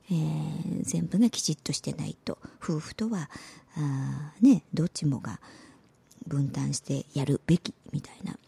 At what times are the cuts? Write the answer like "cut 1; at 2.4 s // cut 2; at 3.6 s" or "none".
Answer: none